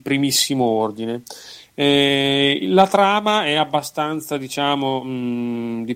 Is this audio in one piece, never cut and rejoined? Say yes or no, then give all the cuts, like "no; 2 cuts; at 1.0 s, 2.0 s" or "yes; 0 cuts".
yes; 0 cuts